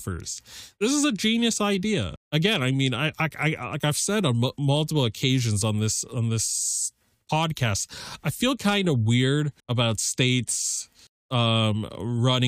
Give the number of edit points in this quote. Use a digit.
2